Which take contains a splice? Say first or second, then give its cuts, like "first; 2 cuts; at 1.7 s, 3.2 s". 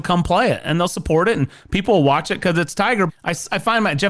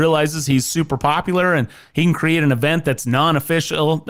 first; 1 cut; at 3.1 s